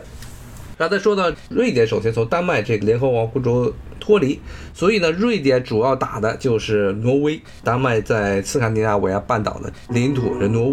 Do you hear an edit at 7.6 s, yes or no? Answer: no